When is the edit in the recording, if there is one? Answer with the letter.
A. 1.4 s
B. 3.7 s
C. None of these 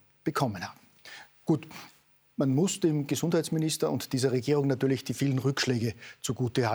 C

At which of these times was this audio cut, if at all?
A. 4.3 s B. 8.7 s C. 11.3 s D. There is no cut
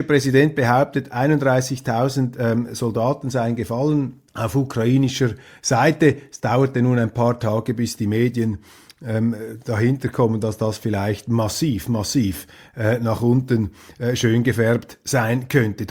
A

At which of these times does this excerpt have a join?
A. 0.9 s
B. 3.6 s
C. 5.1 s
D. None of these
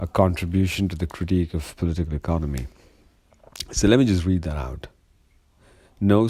D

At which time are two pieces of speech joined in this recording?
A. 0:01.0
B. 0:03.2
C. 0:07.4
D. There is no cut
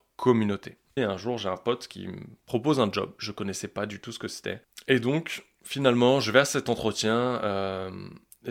A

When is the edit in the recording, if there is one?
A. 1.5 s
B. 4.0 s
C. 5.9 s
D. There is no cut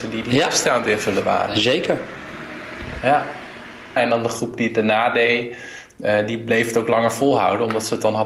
B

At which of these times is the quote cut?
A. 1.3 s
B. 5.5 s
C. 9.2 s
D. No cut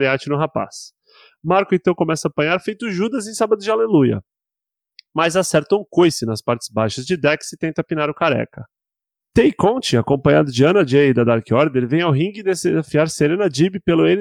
C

